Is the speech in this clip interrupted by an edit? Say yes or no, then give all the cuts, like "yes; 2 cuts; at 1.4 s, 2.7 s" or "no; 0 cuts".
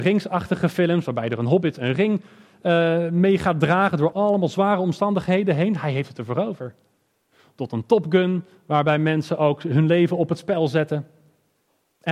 yes; 1 cut; at 4.1 s